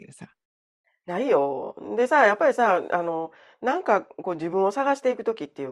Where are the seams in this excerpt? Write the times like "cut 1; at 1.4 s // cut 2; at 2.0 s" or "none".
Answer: none